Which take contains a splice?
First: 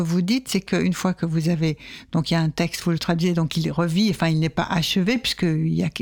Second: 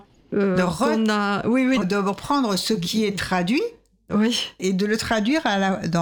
second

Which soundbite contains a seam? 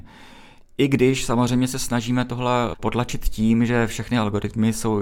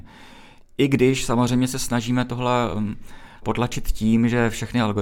first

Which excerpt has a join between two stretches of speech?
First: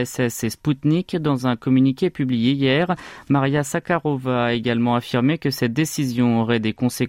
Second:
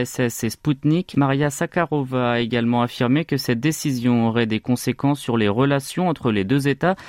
second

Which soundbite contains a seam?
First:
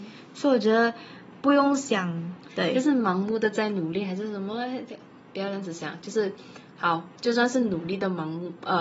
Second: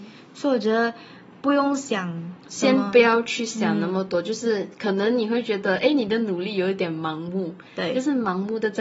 first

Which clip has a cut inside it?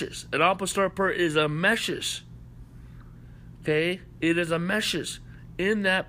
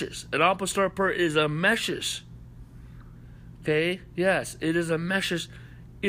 second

